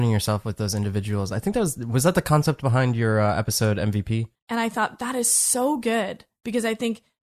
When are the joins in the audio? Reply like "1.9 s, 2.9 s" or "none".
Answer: 4.3 s

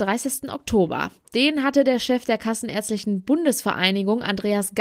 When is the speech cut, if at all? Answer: none

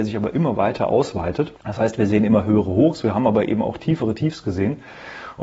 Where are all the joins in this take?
1.6 s

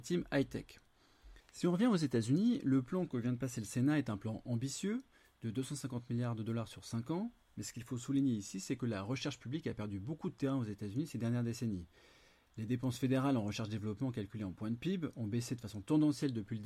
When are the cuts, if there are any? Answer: 1.4 s

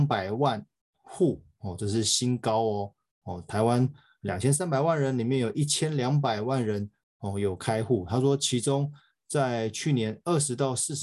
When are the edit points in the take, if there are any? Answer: none

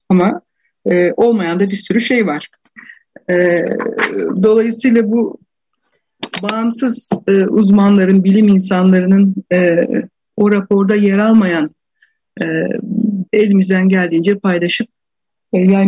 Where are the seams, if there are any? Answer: 13.3 s

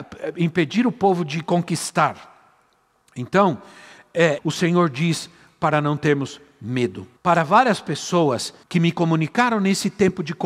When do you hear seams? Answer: 4.4 s, 7.2 s, 8.6 s

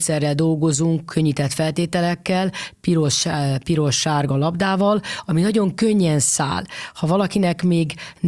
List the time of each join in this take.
none

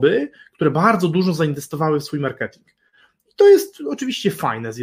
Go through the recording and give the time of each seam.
none

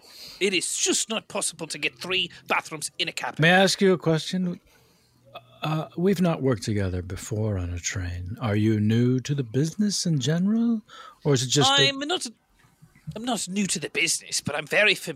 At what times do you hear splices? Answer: none

